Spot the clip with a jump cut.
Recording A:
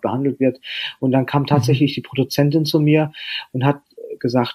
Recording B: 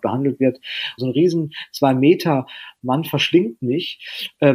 B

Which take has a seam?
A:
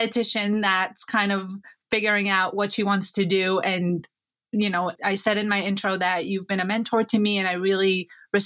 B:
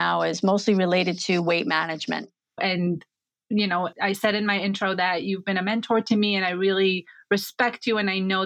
B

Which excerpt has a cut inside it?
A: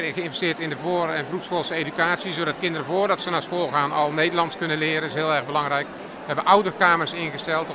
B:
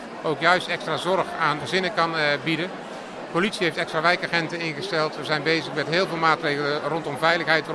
B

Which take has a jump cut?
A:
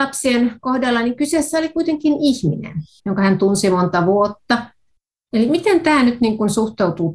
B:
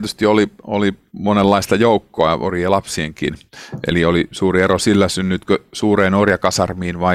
A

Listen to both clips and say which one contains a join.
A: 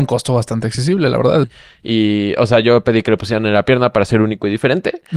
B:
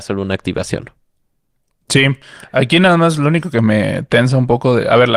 A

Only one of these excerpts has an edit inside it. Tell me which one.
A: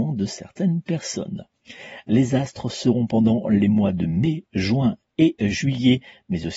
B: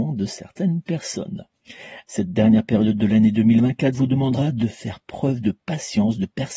B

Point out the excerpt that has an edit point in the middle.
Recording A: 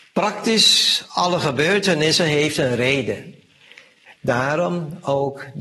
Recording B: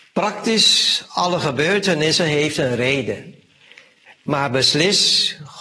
A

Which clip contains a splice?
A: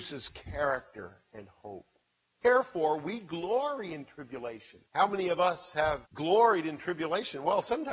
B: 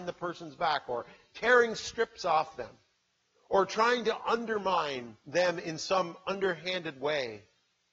A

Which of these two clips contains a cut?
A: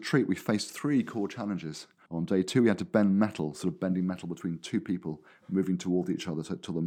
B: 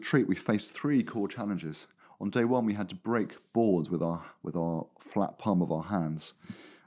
A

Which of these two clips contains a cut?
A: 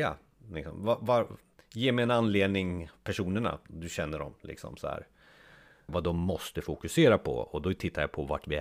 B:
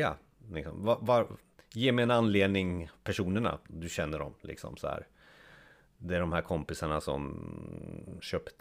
A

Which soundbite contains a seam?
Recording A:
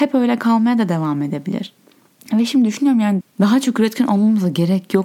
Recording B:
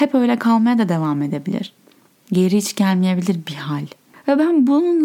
A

